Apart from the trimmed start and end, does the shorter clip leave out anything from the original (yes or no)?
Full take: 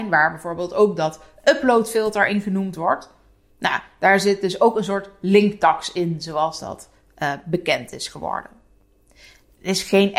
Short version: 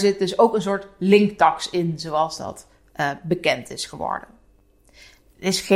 no